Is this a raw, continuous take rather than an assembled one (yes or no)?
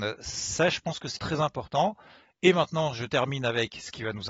no